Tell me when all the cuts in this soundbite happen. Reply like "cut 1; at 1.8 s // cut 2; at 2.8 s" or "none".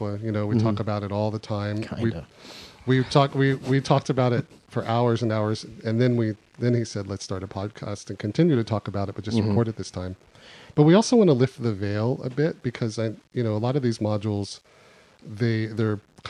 none